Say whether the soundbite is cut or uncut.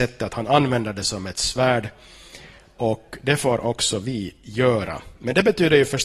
uncut